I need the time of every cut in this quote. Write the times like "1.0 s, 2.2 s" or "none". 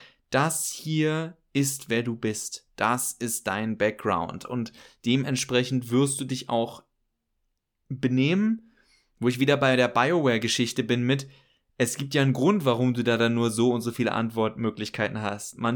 none